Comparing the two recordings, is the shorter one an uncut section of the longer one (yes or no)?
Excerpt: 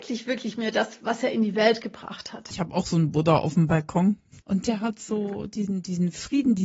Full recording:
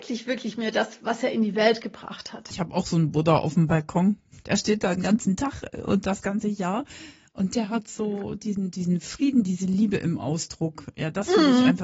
no